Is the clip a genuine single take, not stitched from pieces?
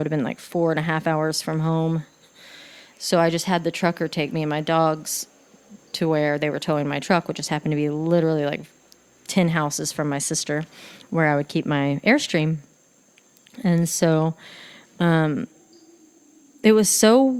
yes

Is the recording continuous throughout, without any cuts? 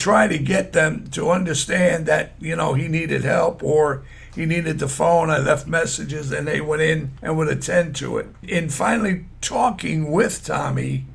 yes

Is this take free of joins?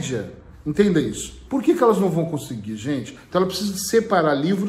no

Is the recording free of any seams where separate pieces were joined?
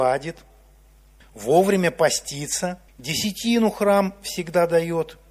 no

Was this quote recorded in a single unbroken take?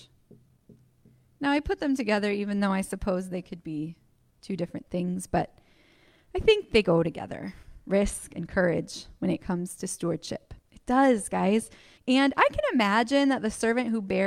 no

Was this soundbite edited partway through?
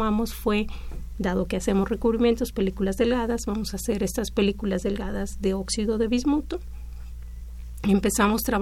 no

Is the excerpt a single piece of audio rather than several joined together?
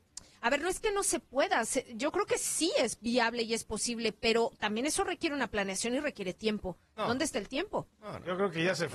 yes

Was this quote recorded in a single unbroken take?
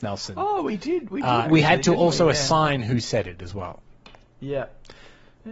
no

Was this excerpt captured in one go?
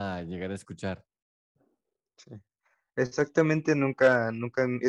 yes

